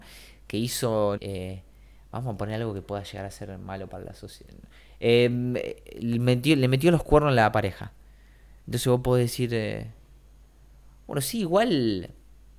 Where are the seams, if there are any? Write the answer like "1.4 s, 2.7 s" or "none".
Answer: 1.2 s